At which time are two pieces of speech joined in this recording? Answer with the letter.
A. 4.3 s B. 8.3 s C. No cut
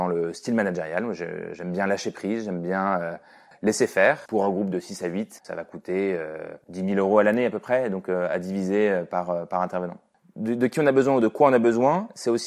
A